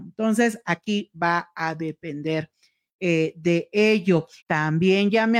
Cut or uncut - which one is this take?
cut